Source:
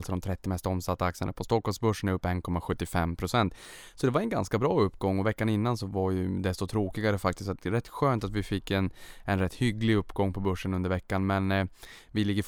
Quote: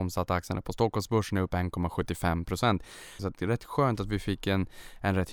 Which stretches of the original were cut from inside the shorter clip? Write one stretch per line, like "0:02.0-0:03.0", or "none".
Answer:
0:03.9-0:07.4